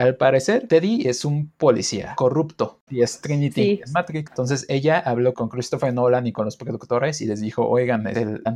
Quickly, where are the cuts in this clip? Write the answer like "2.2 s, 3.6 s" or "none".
2.9 s, 4.3 s